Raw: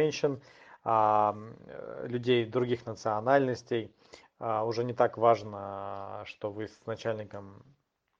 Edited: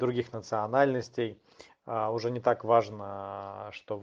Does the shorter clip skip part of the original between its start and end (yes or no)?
no